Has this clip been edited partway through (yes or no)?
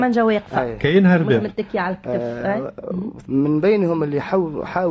yes